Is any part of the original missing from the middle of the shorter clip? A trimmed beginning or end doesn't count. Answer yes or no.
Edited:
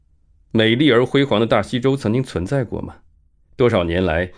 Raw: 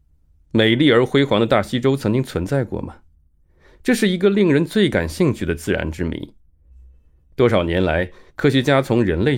yes